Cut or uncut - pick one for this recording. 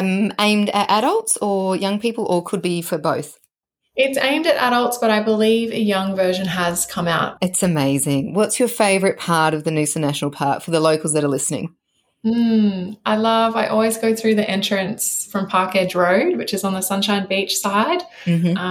cut